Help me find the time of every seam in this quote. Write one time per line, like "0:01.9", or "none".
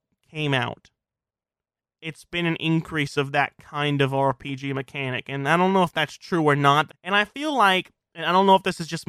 0:06.9